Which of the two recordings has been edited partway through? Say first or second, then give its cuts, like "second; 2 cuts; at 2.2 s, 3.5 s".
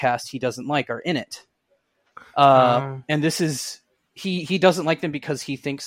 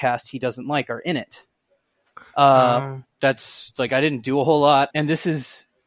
second; 2 cuts; at 3.0 s, 4.9 s